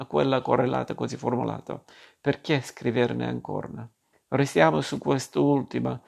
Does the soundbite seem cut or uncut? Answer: cut